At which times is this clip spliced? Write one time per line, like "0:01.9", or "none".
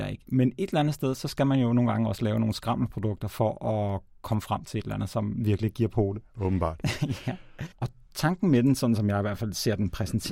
0:07.7